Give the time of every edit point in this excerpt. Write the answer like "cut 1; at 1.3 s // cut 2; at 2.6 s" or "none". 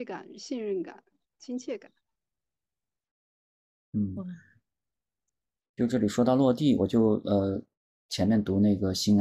none